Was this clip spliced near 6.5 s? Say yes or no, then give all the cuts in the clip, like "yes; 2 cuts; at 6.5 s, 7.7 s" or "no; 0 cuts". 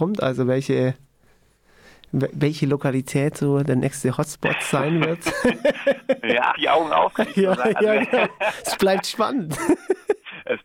yes; 1 cut; at 6.5 s